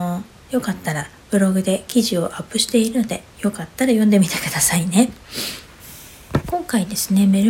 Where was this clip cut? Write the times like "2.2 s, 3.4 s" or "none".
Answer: 3.3 s